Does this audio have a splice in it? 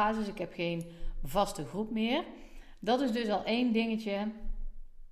no; 0 cuts

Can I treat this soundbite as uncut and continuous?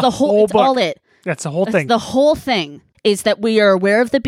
no; 1 cut; at 2.9 s

